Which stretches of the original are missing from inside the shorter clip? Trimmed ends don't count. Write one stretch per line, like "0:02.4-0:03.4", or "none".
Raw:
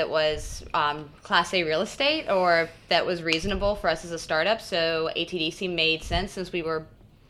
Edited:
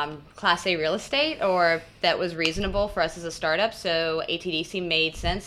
none